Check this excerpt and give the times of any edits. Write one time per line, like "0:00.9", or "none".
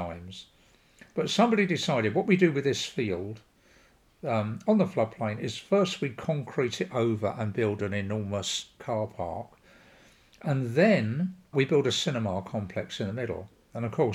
0:11.5

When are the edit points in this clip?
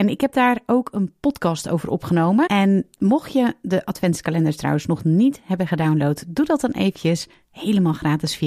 0:02.5

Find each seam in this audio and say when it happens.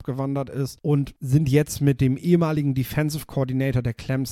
none

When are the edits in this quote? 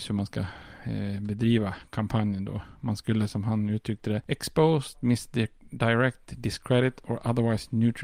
0:04.9

